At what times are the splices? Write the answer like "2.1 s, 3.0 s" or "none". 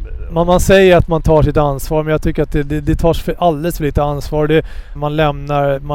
5.0 s